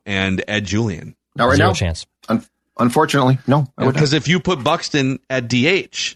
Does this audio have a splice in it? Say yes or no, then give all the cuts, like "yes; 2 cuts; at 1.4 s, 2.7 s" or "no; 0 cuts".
yes; 1 cut; at 1.2 s